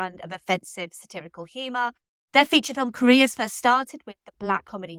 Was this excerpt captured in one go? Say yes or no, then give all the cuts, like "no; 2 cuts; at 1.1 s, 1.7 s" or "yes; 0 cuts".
yes; 0 cuts